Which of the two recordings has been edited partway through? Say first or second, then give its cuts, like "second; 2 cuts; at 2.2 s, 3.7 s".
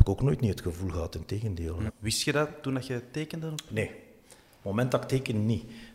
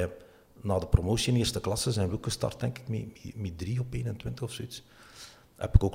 first; 1 cut; at 1.9 s